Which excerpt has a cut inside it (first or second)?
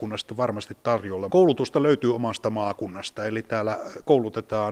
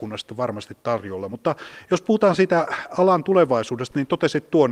first